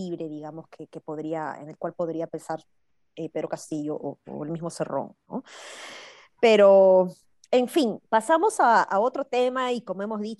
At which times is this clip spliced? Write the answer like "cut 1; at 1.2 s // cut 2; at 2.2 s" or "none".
cut 1; at 8.0 s